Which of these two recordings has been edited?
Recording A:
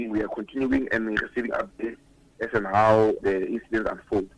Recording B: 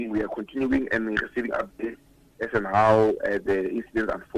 A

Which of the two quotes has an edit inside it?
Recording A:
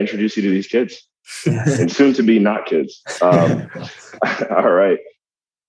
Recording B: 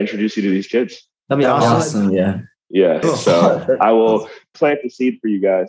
B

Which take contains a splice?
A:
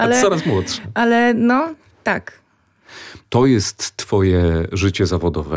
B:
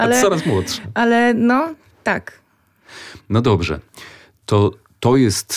A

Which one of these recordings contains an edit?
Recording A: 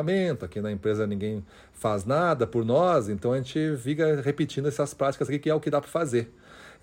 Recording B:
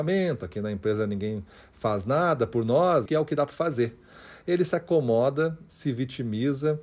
B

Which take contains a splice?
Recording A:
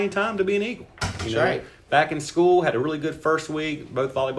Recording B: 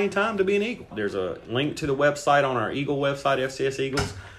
B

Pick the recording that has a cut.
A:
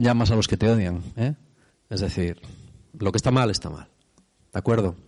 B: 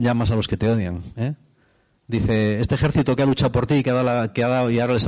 A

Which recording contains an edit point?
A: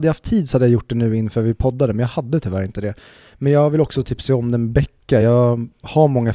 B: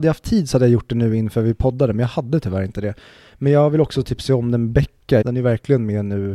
B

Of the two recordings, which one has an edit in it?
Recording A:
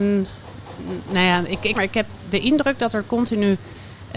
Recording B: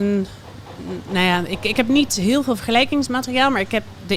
A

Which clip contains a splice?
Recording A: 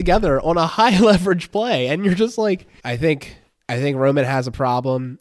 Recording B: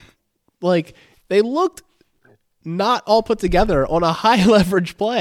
A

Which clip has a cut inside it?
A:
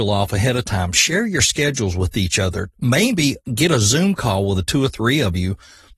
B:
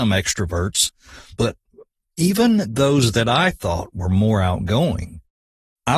B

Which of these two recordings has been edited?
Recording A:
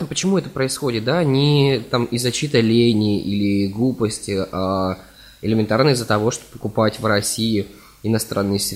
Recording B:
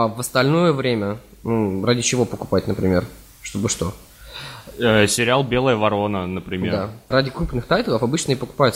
B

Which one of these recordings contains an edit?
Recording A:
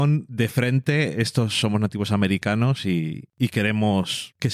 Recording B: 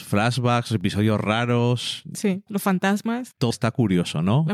B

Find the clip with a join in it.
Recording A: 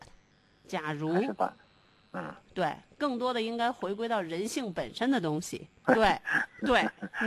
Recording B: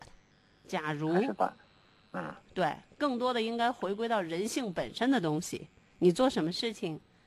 A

